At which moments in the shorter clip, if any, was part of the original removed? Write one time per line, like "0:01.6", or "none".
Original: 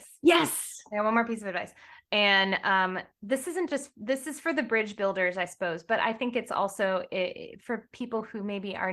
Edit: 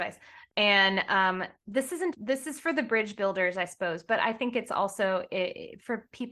0:02.1